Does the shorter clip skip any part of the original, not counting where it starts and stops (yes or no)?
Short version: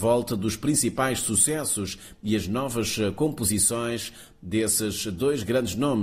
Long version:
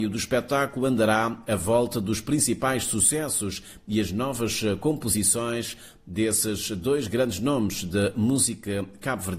no